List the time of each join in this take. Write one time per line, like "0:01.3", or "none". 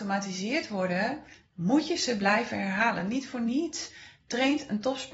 none